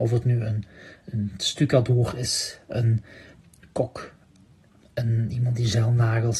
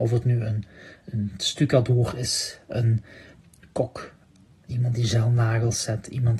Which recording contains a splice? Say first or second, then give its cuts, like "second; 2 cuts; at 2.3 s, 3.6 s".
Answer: second; 1 cut; at 4.7 s